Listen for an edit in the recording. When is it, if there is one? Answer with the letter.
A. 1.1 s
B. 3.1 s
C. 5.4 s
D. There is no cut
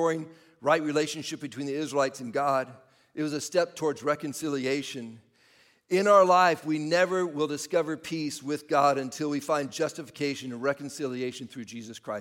D